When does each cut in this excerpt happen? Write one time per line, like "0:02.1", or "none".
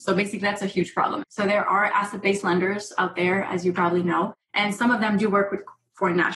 0:01.2